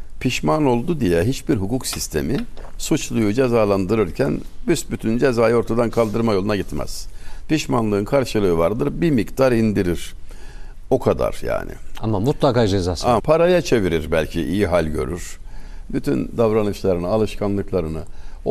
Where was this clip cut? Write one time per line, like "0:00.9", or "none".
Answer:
0:13.2
0:15.9